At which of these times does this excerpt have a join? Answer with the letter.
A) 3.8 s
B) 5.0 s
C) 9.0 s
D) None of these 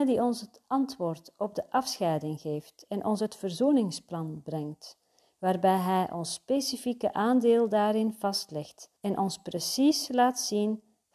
C